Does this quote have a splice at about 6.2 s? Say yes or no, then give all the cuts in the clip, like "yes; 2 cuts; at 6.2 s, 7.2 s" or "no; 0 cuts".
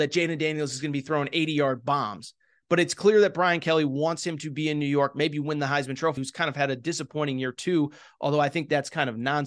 yes; 1 cut; at 6.2 s